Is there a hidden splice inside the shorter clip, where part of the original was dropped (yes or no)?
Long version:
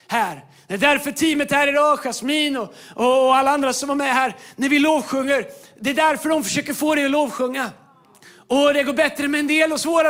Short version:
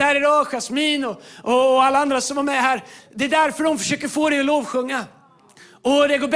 yes